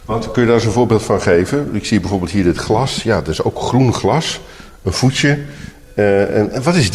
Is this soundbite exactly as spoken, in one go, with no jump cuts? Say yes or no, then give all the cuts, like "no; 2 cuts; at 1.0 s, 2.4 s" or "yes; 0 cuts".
yes; 0 cuts